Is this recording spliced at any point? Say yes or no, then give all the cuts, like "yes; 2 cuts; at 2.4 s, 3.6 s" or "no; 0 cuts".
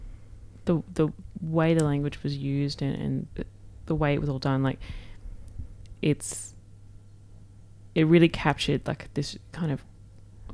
yes; 1 cut; at 3.3 s